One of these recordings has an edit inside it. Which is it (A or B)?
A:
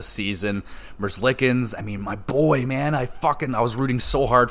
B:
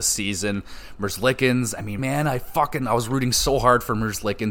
B